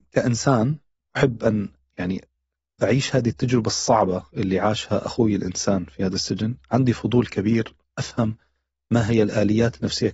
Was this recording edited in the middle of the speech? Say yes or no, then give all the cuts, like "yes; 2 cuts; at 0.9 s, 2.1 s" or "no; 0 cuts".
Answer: no; 0 cuts